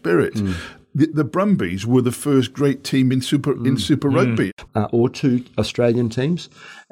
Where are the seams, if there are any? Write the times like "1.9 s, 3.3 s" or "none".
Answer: 4.7 s